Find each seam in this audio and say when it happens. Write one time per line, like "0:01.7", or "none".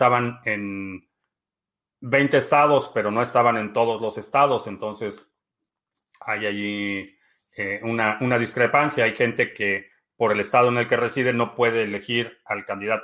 none